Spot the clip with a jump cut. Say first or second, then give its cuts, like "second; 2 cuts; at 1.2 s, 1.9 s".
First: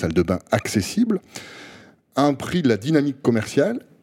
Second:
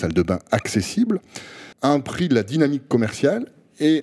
second; 1 cut; at 1.7 s